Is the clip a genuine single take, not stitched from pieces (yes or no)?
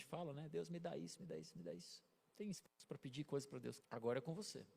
no